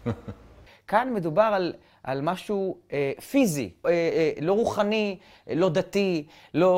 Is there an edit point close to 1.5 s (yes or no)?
no